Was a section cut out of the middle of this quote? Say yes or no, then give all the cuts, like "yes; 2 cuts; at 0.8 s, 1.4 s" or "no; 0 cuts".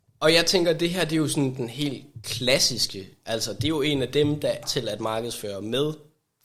yes; 1 cut; at 4.6 s